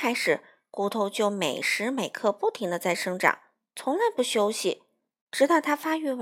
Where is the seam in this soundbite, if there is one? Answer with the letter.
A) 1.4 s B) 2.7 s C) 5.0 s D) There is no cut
D